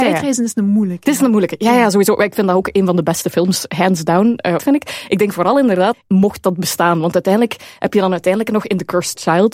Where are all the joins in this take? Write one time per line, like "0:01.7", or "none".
0:04.6
0:05.9